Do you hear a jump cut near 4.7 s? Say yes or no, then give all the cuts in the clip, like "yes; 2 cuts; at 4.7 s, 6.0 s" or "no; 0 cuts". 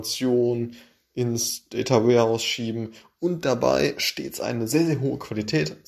no; 0 cuts